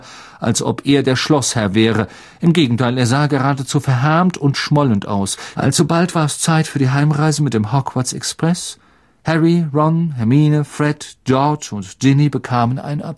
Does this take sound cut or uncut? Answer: cut